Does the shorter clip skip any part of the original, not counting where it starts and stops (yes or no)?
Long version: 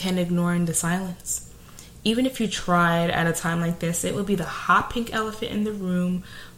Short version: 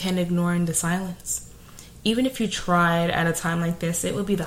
no